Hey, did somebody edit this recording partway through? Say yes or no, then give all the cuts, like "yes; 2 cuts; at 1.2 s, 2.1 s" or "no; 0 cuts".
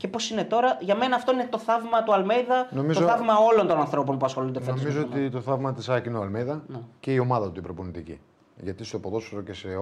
no; 0 cuts